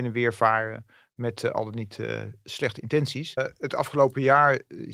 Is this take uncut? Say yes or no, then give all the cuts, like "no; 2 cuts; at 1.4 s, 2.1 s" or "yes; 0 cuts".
no; 1 cut; at 3.4 s